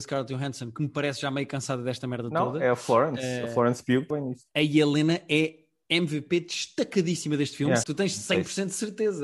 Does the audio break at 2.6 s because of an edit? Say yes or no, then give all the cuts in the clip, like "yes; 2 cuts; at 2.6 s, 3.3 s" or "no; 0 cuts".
no; 2 cuts; at 4.1 s, 7.8 s